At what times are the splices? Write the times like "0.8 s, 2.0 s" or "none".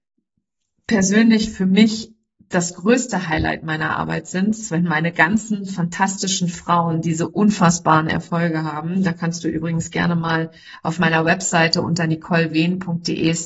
none